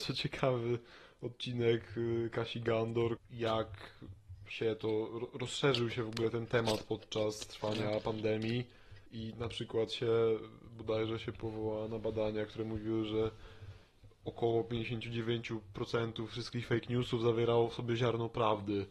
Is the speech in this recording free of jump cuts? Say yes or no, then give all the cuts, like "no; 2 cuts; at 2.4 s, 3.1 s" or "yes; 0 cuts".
no; 2 cuts; at 3.2 s, 9.1 s